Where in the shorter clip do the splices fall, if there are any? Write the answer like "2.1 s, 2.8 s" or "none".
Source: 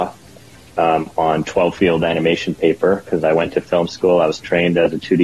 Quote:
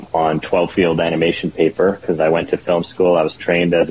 none